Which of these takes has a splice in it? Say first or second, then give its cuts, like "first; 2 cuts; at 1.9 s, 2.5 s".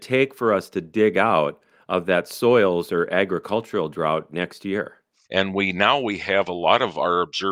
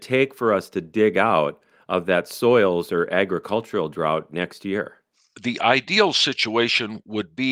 first; 1 cut; at 5.3 s